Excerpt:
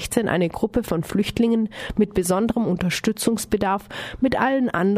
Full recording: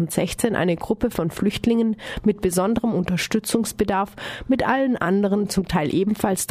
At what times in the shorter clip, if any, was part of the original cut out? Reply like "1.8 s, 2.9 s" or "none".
none